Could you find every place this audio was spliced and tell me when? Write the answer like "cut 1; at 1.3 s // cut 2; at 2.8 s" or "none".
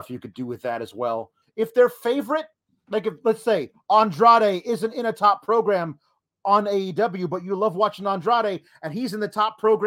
cut 1; at 1.4 s

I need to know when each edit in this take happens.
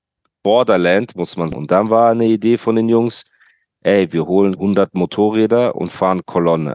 cut 1; at 1.5 s // cut 2; at 4.6 s

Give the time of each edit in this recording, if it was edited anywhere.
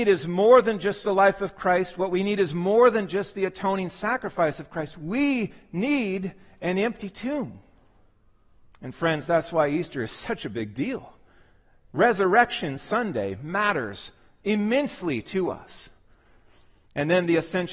none

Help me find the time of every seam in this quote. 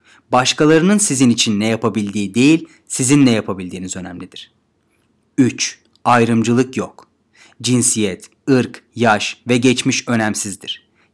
cut 1; at 8.9 s

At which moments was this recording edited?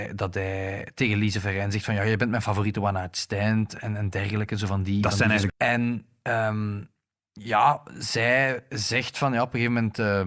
cut 1; at 5.5 s

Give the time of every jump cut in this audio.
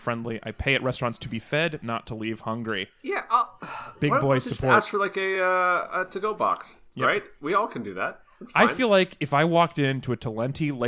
none

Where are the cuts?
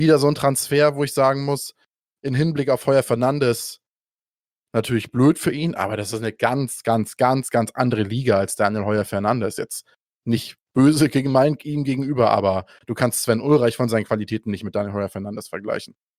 none

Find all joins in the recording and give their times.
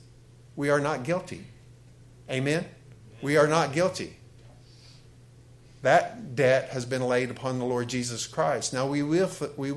none

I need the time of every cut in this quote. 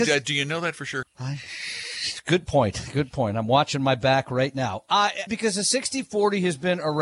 cut 1; at 1.0 s // cut 2; at 5.3 s

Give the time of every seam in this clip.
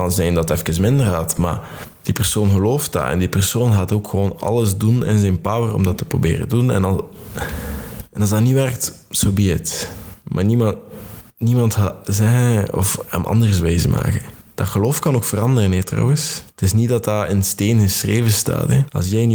none

